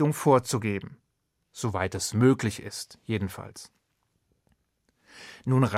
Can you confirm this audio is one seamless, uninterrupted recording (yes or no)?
yes